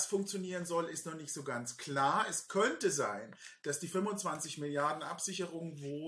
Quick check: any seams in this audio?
no; 0 cuts

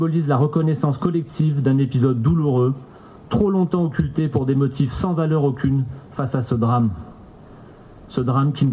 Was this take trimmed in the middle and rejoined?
no; 0 cuts

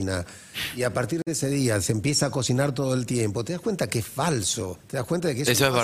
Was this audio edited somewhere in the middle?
yes; 1 cut; at 4.8 s

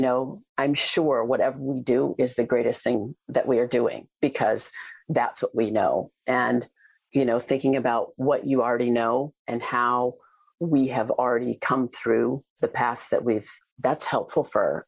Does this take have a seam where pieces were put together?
yes; 1 cut; at 13.6 s

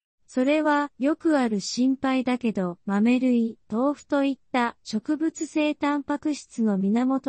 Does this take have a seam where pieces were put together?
yes; 1 cut; at 3.6 s

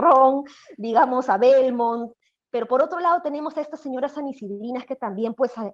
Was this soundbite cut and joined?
no; 0 cuts

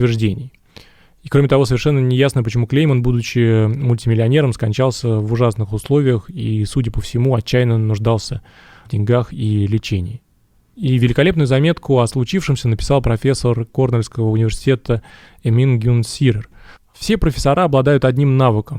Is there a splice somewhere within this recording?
yes; 1 cut; at 16.8 s

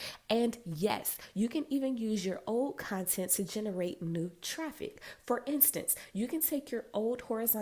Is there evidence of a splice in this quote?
no; 0 cuts

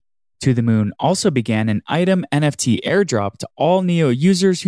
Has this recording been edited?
no; 0 cuts

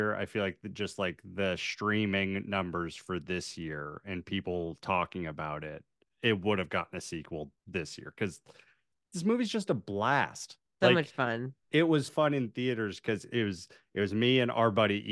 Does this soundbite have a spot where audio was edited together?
yes; 2 cuts; at 7.6 s, 12.1 s

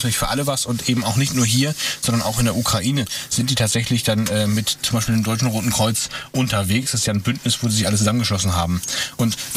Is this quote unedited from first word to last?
yes; 0 cuts

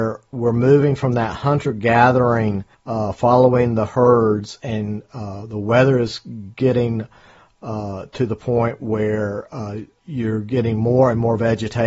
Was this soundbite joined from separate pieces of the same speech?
no; 0 cuts

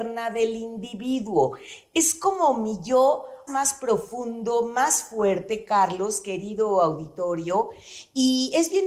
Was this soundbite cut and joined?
yes; 1 cut; at 3.5 s

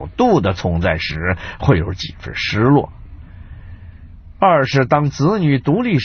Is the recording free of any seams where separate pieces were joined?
yes; 0 cuts

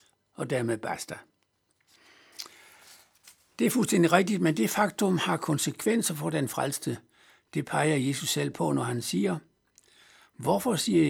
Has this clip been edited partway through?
no; 0 cuts

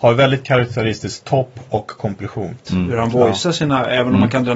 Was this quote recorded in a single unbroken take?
no; 1 cut; at 2.7 s

